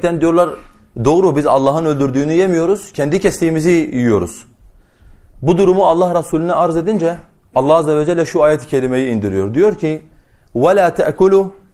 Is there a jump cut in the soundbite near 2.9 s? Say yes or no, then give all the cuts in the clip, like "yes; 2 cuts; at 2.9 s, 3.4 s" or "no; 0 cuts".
yes; 1 cut; at 2.9 s